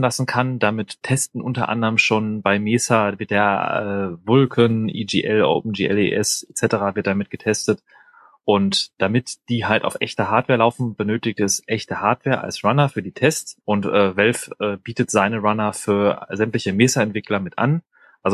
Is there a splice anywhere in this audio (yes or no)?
yes